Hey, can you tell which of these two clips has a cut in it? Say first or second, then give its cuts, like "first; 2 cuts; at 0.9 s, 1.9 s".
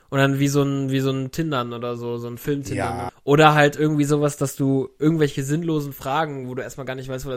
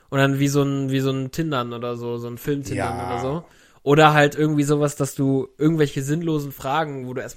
first; 1 cut; at 3.1 s